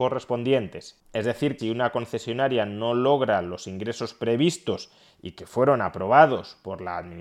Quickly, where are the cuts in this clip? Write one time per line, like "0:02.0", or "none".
0:01.6